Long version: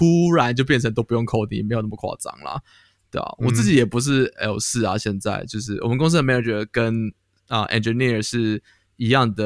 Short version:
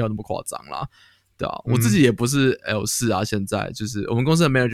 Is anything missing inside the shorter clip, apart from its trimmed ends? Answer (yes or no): no